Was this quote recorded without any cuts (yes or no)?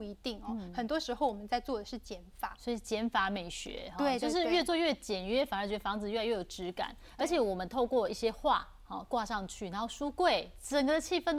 yes